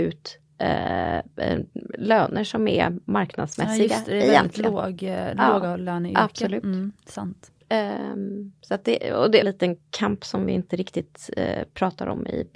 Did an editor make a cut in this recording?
yes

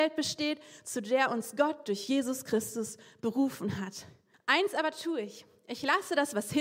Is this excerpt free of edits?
no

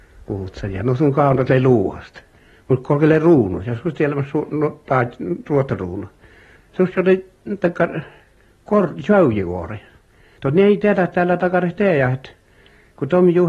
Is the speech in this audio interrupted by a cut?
yes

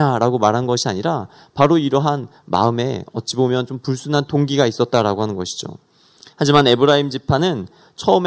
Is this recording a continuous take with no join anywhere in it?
no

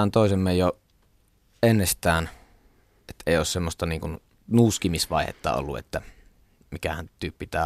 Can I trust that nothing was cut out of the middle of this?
yes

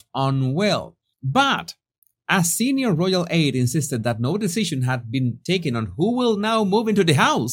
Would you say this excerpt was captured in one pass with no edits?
no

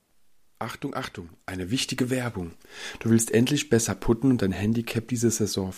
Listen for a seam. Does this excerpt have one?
no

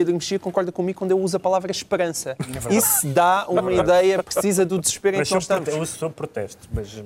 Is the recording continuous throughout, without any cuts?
yes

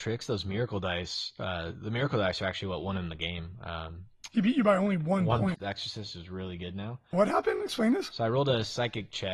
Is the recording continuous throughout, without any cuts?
no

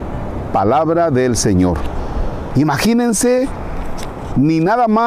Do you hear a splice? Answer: yes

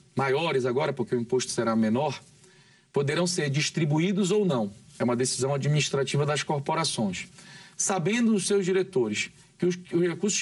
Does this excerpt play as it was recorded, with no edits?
yes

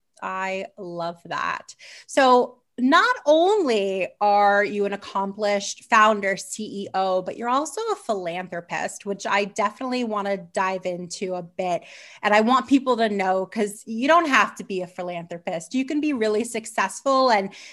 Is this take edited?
no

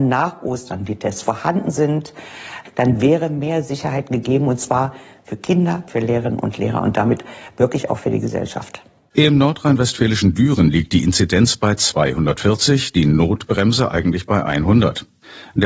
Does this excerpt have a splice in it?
yes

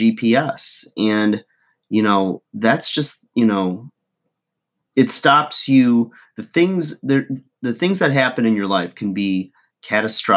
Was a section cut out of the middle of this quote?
no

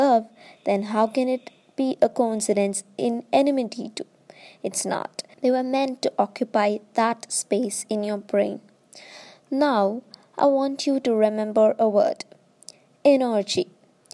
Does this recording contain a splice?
yes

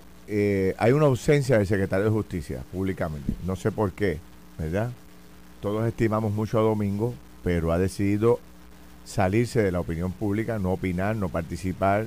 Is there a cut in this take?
no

